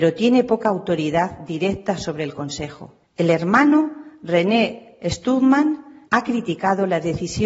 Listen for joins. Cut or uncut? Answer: cut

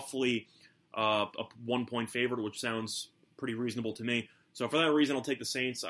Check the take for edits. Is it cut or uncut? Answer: uncut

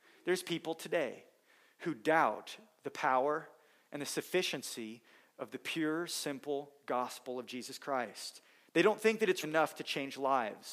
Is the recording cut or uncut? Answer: cut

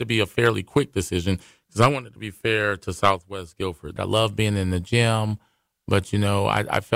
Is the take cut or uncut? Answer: cut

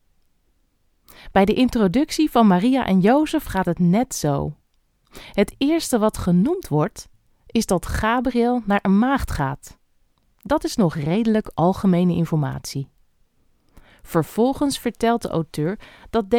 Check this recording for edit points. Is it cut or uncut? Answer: uncut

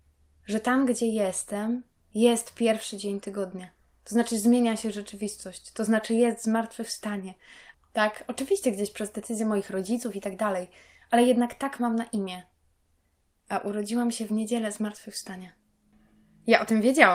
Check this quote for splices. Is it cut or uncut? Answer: cut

